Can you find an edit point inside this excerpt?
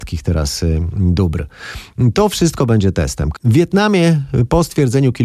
yes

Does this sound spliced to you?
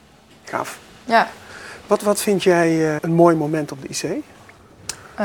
yes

